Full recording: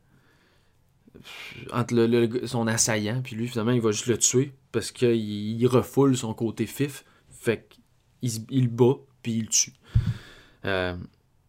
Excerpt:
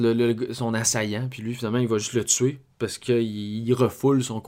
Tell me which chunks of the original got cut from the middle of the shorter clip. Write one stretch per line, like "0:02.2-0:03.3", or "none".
none